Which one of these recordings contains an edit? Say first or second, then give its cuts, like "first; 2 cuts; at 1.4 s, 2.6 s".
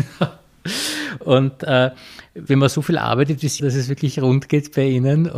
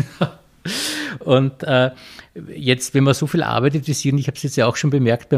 first; 2 cuts; at 2.5 s, 3.6 s